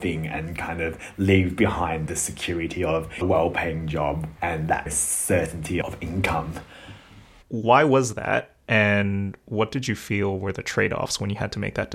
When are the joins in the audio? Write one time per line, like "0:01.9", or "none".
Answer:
0:04.4
0:07.4
0:08.6